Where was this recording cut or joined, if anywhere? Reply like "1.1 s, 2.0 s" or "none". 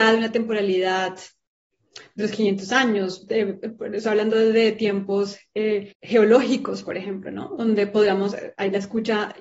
5.9 s